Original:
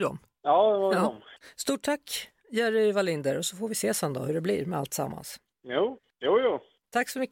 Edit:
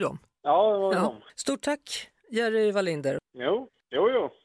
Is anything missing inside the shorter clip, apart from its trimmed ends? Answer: yes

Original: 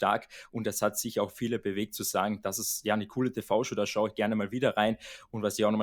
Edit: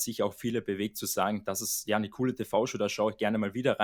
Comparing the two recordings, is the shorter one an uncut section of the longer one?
yes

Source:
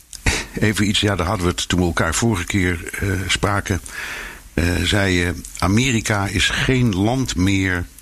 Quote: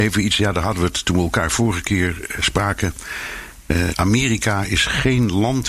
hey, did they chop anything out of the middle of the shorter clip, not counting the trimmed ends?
yes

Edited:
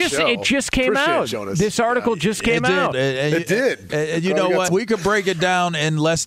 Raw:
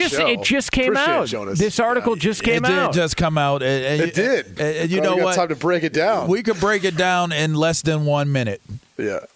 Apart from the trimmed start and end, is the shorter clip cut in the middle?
yes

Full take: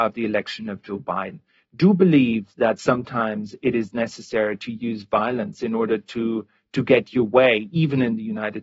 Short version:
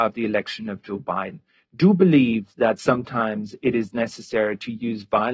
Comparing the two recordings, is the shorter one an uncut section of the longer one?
yes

